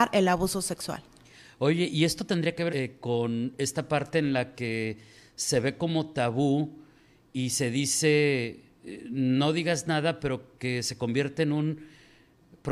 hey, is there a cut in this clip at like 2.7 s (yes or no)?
yes